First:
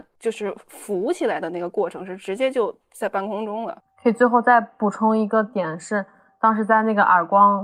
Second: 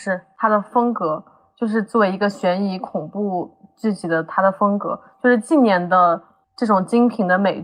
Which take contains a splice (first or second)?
first